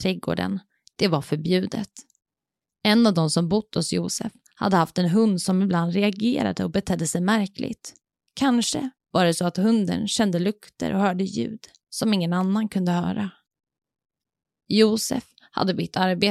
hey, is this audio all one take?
yes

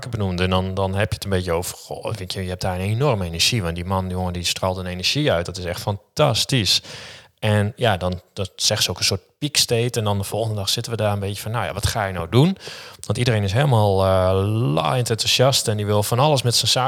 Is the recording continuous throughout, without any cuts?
yes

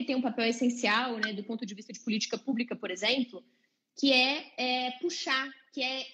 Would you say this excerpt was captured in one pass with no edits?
yes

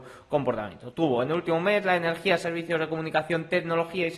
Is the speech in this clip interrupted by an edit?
no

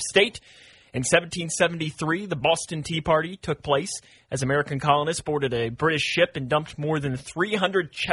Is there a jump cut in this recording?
no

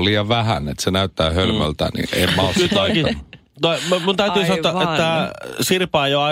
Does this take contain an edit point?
no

